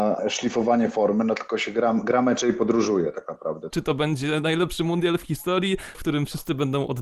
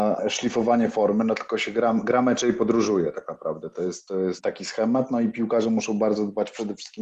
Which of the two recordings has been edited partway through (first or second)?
first